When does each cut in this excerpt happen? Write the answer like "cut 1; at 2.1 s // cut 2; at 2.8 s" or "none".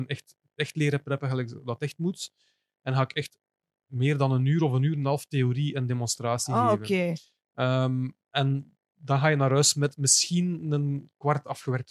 none